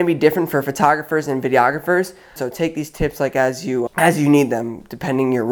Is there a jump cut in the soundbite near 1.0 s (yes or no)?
no